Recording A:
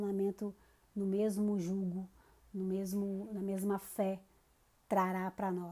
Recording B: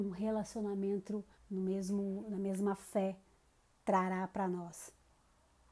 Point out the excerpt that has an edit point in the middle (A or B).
B